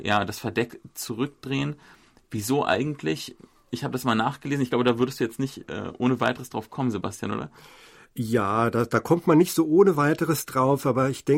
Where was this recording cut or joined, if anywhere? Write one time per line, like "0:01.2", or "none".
none